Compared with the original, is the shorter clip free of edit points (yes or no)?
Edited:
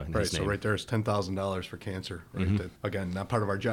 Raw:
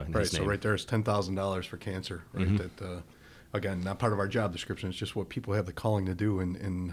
no